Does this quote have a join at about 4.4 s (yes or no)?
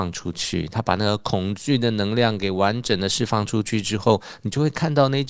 no